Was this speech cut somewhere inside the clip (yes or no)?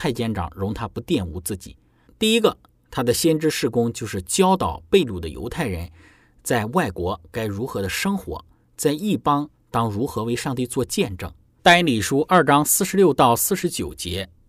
yes